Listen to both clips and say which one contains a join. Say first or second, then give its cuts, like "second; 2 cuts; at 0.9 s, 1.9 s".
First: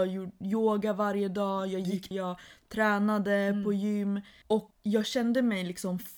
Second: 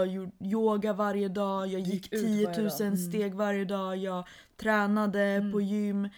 first; 1 cut; at 2.1 s